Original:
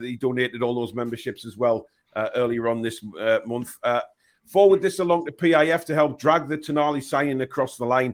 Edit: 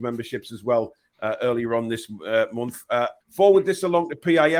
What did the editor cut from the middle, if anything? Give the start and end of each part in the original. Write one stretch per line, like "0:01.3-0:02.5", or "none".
0:04.1-0:04.4